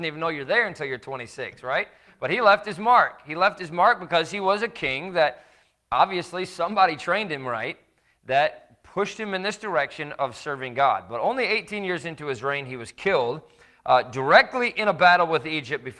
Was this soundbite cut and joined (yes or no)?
no